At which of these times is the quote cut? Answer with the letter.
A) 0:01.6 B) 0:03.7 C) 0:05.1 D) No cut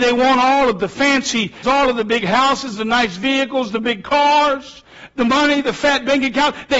A